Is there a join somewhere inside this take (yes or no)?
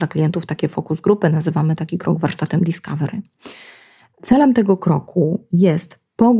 no